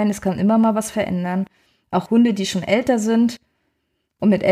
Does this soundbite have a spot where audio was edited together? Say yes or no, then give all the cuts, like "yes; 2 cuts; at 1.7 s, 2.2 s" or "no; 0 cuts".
no; 0 cuts